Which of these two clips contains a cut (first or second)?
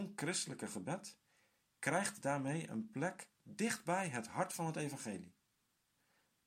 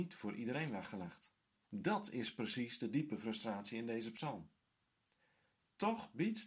second